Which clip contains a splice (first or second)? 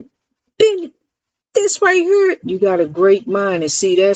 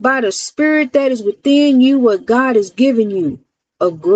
first